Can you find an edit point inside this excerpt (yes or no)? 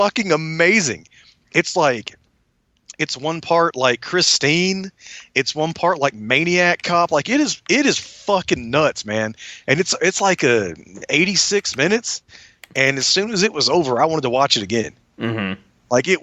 no